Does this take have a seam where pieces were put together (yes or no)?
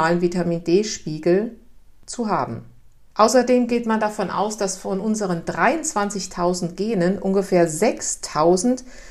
no